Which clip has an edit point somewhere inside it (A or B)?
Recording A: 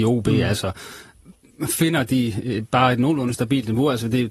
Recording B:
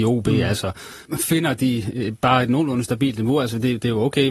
B